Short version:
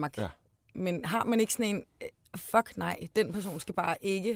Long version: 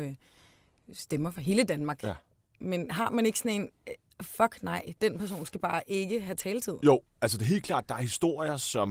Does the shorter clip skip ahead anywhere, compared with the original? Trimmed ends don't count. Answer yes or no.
no